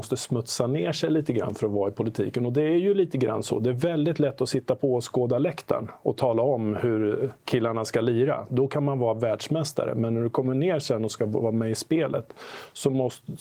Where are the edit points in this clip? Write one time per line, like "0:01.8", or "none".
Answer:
0:07.4